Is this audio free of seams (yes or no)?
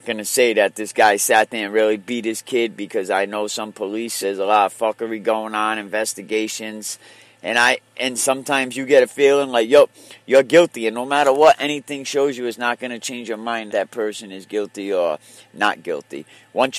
no